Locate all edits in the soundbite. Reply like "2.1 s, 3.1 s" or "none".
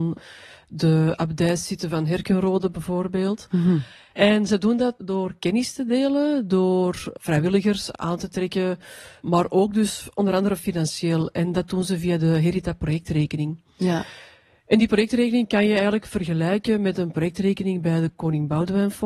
4.1 s